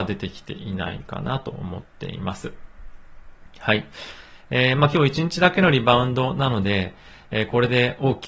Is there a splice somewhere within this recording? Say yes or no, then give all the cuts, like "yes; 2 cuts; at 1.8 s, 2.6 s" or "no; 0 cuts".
no; 0 cuts